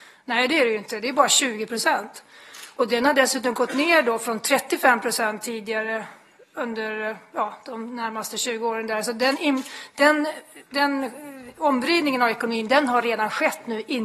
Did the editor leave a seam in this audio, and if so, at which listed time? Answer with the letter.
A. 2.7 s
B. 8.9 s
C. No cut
C